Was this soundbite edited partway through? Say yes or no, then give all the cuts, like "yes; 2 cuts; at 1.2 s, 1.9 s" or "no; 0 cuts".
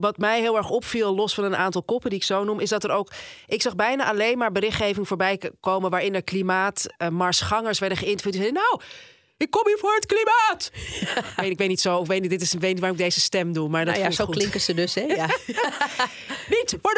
no; 0 cuts